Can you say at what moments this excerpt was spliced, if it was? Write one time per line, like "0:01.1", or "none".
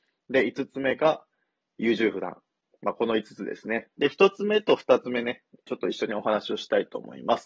0:03.9
0:05.7